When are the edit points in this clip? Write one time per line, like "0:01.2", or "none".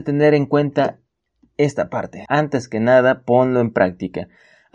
0:02.3